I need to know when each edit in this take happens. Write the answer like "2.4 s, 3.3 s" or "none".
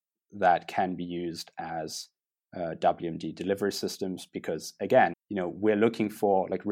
5.1 s

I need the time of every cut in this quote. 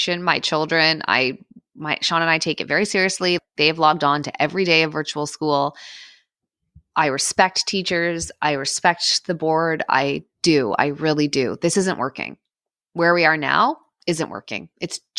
none

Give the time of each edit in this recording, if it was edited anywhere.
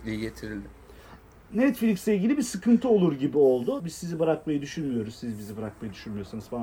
3.8 s

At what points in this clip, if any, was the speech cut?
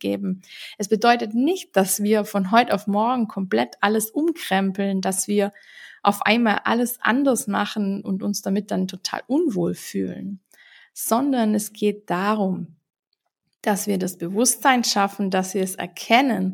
none

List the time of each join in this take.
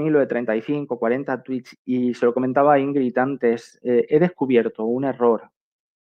none

